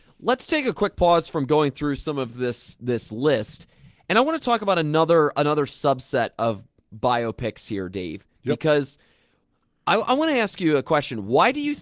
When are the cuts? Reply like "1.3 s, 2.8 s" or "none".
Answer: none